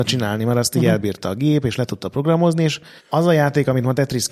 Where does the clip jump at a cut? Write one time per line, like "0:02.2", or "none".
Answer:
0:03.0